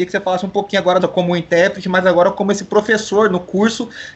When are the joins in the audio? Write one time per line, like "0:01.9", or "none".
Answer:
0:01.0